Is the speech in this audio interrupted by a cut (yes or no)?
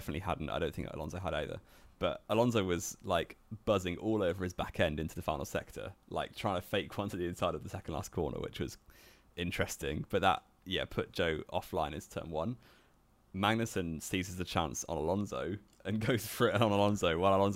no